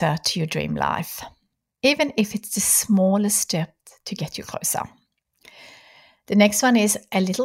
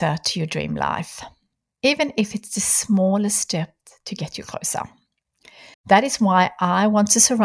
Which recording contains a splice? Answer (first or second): second